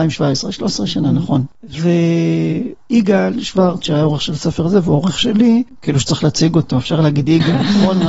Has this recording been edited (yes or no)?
no